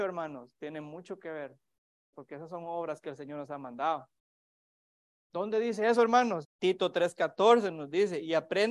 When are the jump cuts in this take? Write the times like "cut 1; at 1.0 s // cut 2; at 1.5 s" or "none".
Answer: cut 1; at 2.1 s // cut 2; at 6.4 s